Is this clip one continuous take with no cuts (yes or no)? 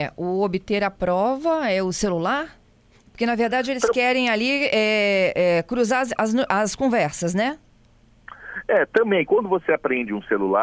yes